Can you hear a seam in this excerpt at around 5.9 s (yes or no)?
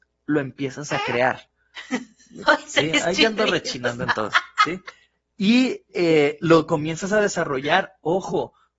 no